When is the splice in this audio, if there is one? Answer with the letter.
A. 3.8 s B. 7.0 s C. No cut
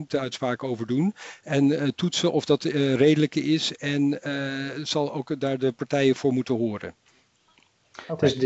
C